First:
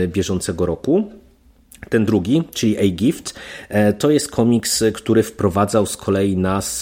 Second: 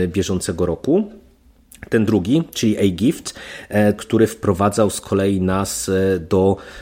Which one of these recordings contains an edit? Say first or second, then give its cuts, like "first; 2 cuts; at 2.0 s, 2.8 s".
second; 1 cut; at 4.0 s